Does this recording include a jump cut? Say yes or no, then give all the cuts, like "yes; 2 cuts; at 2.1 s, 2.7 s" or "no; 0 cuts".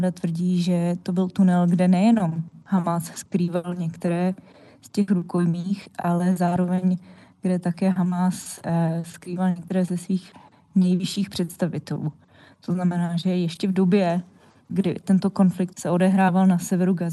no; 0 cuts